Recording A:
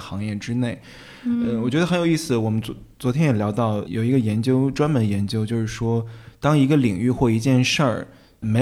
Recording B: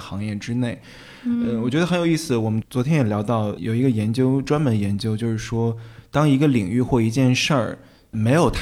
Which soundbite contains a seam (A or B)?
B